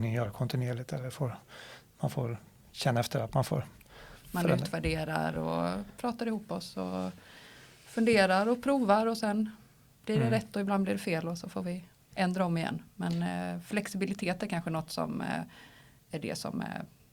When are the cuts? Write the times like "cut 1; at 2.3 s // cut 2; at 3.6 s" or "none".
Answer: cut 1; at 4.2 s